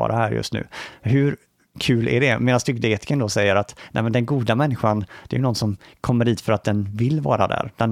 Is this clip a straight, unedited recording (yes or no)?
yes